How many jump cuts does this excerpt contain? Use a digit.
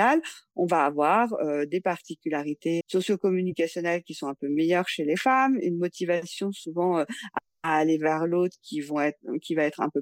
1